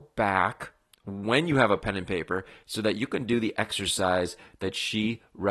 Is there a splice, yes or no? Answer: no